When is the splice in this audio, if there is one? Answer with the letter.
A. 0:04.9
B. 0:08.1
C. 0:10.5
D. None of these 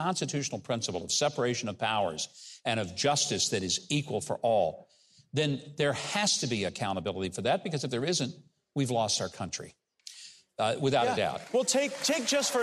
D